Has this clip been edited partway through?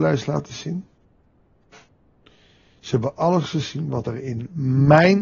no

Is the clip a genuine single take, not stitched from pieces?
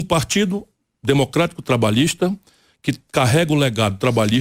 yes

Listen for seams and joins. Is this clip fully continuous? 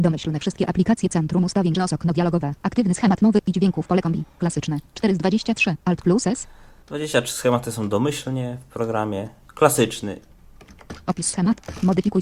yes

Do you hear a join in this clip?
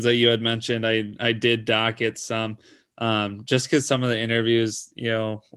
no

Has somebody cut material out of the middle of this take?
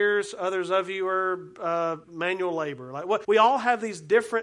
yes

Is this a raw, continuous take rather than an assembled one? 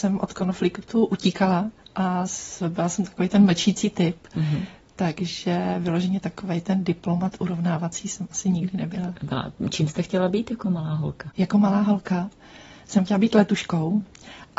yes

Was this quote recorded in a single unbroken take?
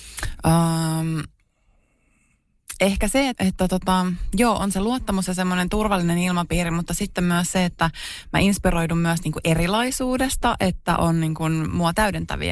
no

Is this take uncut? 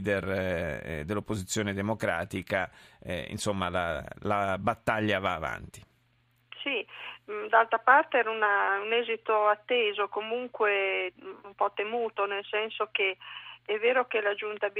yes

